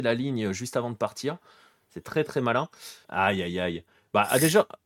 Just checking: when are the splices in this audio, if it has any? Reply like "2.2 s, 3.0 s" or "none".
3.0 s